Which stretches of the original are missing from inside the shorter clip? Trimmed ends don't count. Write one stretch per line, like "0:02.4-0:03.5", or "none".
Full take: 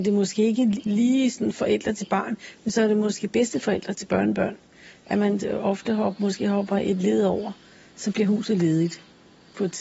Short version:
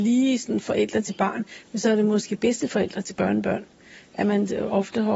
none